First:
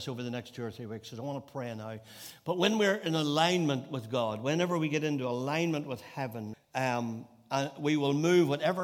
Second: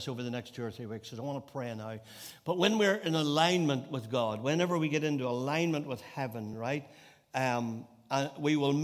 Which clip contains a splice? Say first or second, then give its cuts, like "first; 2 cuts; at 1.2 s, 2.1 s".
first; 1 cut; at 6.5 s